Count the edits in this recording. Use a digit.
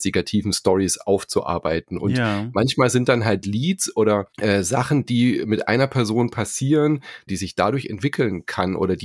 2